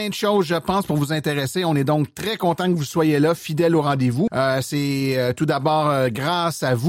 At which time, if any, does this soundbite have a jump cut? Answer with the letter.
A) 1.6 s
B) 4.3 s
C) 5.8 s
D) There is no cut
B